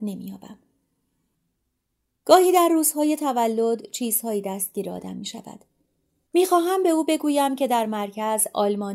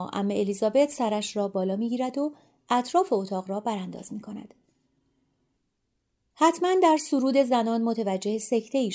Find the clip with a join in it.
first; 1 cut; at 6.3 s

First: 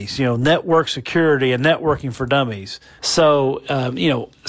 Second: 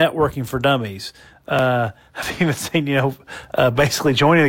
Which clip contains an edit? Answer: first; 1 cut; at 3.0 s

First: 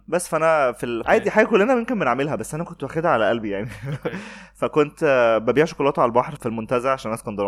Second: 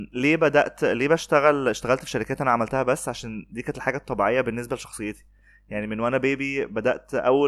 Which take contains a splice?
first; 2 cuts; at 1.0 s, 6.4 s

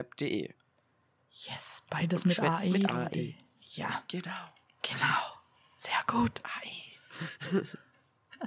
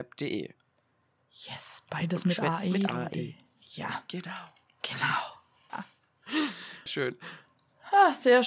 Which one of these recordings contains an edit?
second; 2 cuts; at 5.7 s, 6.9 s

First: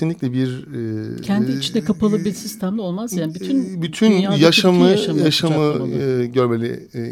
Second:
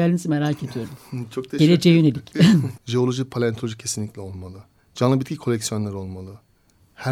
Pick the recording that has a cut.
second; 1 cut; at 2.8 s

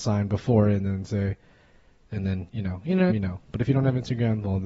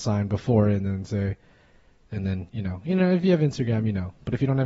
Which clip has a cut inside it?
first; 1 cut; at 3.1 s

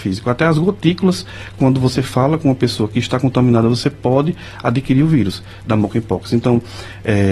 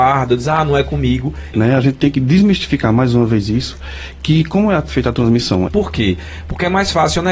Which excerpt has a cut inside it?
second; 2 cuts; at 1.5 s, 5.7 s

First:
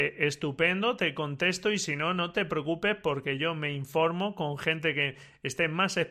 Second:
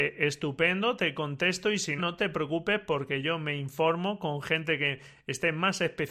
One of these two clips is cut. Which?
second; 1 cut; at 2.0 s

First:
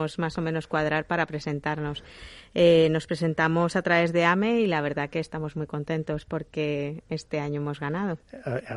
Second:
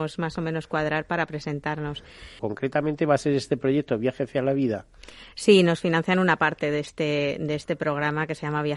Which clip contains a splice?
second; 1 cut; at 2.4 s

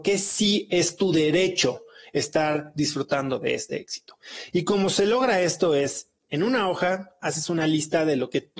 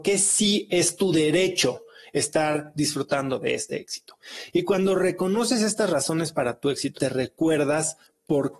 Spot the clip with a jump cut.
second; 2 cuts; at 4.5 s, 7.0 s

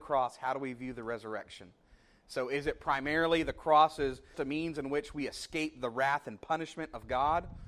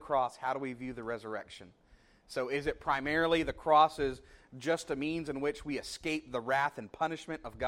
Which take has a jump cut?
first; 1 cut; at 4.3 s

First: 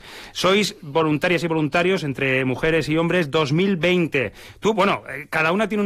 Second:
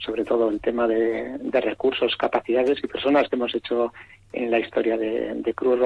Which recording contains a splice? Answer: second; 1 cut; at 1.4 s

